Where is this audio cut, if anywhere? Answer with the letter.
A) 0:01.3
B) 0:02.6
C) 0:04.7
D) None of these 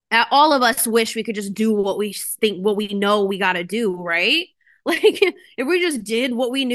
D